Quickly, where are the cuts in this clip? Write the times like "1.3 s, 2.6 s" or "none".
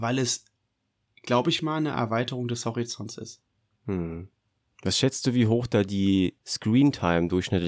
1.6 s